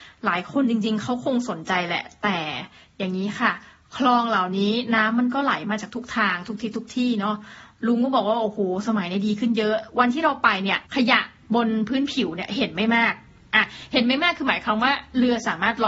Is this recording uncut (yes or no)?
no